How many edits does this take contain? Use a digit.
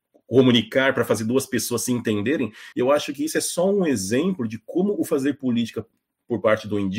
1